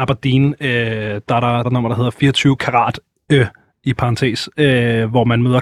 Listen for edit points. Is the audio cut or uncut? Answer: cut